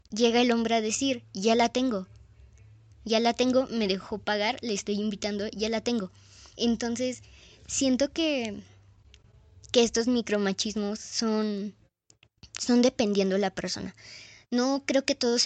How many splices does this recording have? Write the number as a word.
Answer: one